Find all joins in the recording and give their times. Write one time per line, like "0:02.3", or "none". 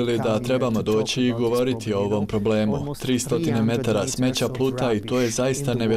none